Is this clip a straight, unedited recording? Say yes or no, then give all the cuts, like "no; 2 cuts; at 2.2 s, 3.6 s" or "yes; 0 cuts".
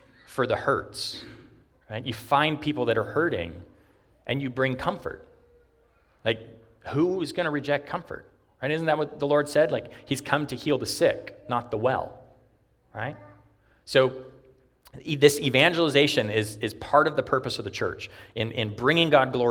yes; 0 cuts